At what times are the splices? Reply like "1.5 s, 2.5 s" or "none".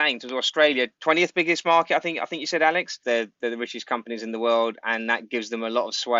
3.0 s